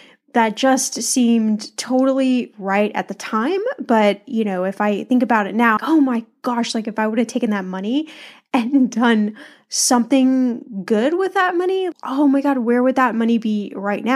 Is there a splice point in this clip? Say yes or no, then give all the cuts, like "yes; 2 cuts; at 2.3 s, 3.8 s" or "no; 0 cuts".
yes; 2 cuts; at 5.8 s, 11.9 s